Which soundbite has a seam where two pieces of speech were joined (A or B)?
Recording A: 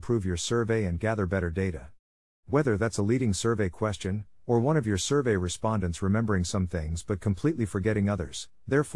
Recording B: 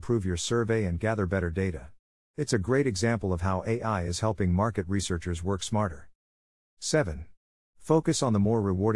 A